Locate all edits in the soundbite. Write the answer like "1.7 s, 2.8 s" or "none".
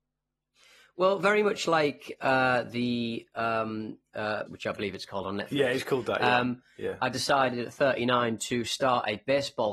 4.5 s